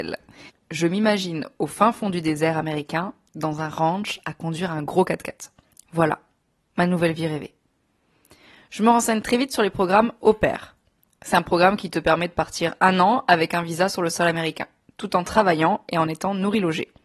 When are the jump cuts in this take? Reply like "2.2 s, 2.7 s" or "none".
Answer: none

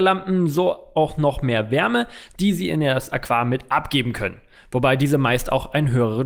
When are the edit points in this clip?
none

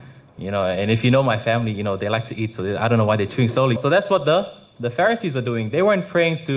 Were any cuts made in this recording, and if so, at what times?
3.8 s

